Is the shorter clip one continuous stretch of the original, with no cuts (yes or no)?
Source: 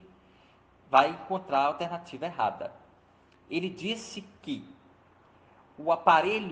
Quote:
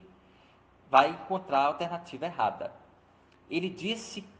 yes